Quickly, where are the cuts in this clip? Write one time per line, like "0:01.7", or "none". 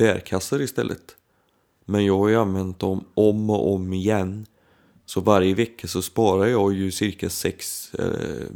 0:01.8